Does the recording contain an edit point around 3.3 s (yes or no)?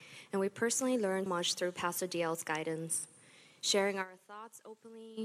no